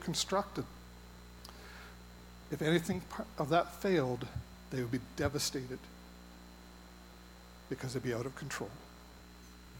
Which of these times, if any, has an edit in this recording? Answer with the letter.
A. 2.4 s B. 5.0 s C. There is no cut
C